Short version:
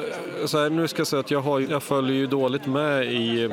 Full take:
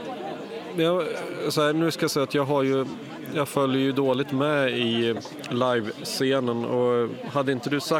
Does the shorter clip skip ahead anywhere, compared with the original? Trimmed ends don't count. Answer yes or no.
yes